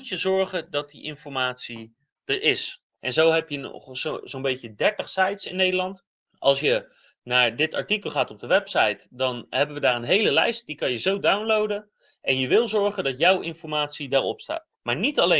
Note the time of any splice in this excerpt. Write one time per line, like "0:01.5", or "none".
0:03.0